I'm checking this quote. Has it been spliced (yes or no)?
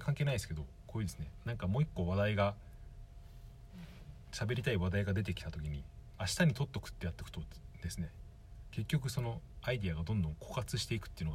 yes